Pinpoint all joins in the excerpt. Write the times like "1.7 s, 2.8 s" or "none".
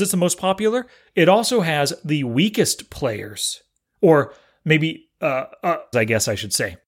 5.9 s